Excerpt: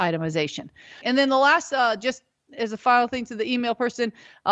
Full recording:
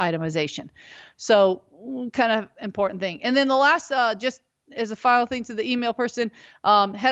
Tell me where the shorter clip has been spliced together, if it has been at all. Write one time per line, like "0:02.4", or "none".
0:01.0